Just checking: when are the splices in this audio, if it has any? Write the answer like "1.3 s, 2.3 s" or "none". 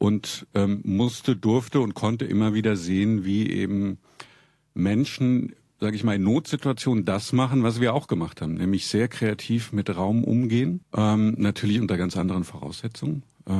10.8 s